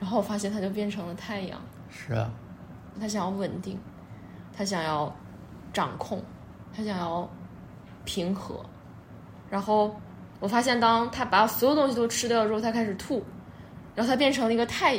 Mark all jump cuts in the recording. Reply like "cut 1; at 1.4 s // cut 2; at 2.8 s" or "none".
cut 1; at 2.9 s